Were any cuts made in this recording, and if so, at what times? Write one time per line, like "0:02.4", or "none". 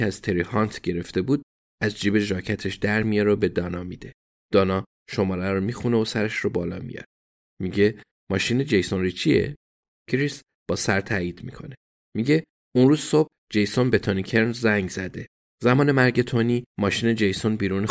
0:04.4